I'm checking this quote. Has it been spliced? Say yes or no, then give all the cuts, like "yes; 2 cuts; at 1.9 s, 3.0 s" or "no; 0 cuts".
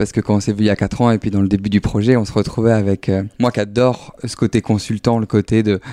no; 0 cuts